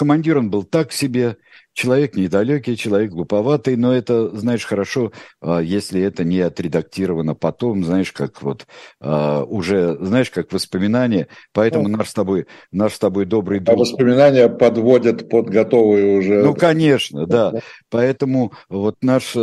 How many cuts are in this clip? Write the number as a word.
zero